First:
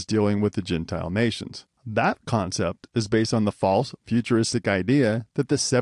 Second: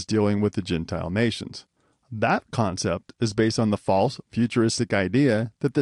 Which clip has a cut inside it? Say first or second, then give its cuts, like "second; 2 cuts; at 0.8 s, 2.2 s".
first; 1 cut; at 1.7 s